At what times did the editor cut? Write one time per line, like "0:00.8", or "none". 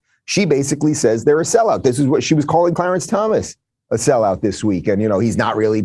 none